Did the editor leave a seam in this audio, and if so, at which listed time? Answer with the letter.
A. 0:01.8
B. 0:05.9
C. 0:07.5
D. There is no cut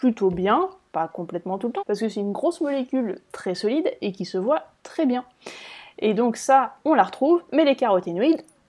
A